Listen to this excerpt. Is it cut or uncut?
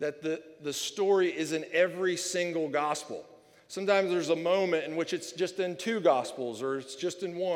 uncut